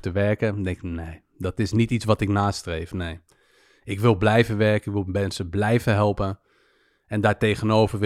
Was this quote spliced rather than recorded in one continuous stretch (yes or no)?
no